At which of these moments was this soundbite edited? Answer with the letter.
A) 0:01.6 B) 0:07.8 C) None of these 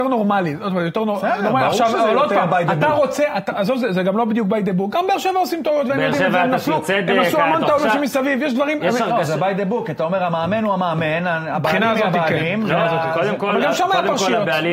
B